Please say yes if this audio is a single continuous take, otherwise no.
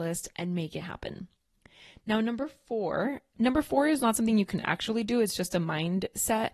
yes